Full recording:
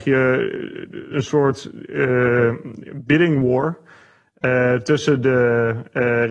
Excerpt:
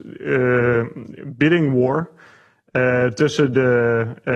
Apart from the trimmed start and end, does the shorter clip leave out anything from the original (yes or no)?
no